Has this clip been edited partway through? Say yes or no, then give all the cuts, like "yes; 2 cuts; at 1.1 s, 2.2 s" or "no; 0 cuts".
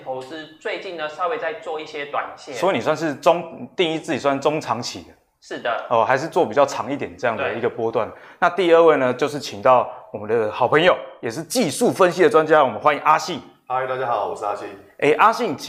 no; 0 cuts